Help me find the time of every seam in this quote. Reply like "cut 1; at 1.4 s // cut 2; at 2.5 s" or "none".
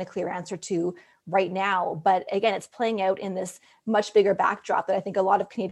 none